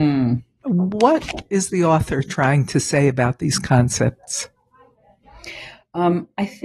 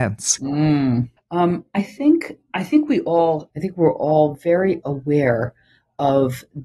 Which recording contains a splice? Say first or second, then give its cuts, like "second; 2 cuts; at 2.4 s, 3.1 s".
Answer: second; 2 cuts; at 1.2 s, 3.5 s